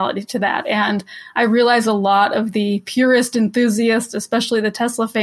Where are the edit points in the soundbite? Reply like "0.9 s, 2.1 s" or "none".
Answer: none

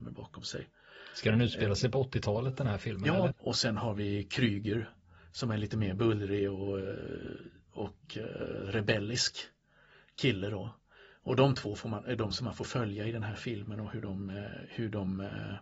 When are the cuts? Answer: 3.3 s

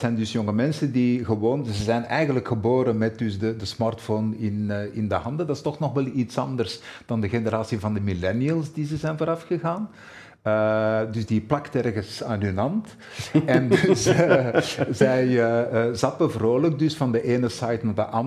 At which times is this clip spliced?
none

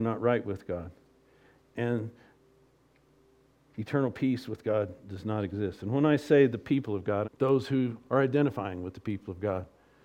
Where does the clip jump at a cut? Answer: 7.2 s

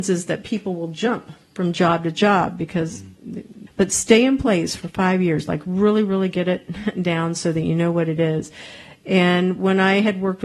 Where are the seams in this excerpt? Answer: 3.7 s

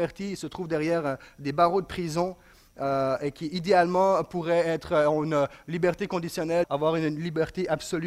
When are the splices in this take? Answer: 6.6 s

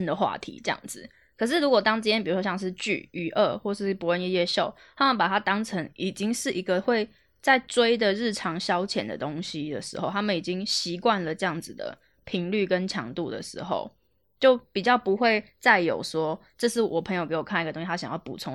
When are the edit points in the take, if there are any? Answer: none

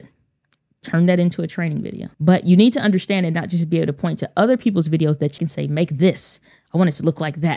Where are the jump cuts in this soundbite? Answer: 2.1 s, 5.4 s

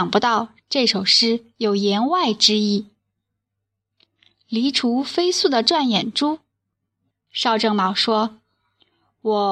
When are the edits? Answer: 7.1 s

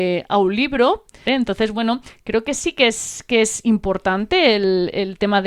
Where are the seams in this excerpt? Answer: 1.3 s

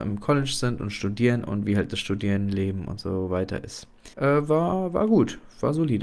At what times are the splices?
4.1 s

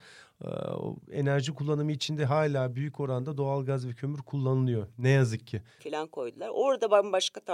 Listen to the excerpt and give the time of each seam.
5.8 s

